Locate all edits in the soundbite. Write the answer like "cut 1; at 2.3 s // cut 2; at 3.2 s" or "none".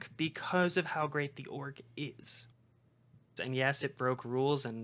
cut 1; at 3.4 s